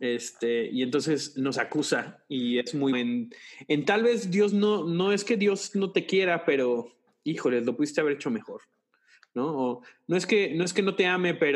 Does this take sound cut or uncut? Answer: cut